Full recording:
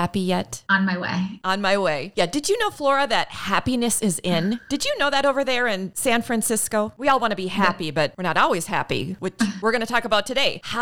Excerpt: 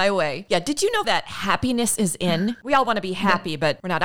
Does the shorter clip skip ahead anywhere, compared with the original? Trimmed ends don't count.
yes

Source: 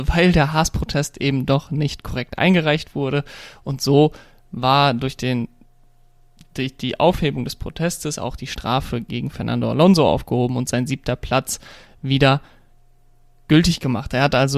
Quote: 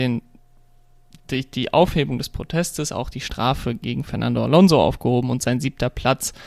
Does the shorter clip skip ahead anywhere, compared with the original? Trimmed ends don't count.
no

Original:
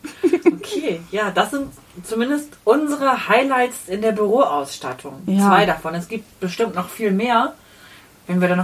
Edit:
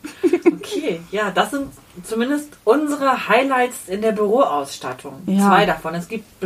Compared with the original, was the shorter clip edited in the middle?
no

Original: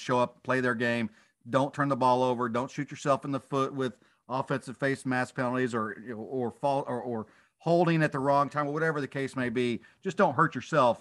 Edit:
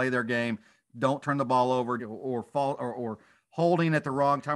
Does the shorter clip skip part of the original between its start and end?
yes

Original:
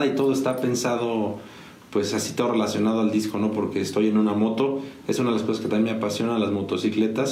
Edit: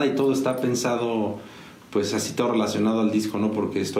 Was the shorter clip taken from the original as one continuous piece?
yes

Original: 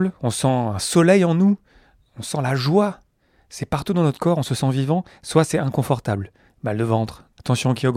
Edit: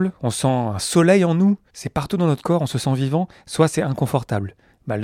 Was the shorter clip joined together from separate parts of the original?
yes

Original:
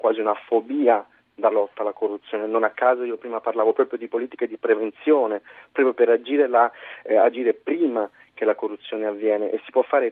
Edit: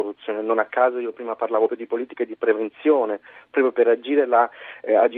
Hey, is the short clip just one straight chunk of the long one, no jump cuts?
no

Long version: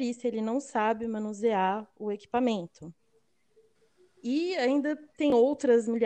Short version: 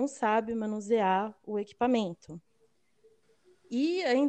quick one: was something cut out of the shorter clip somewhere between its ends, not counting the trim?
no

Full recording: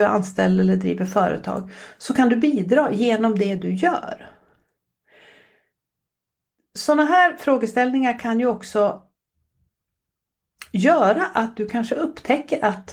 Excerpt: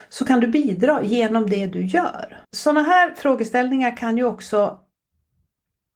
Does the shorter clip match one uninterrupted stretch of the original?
no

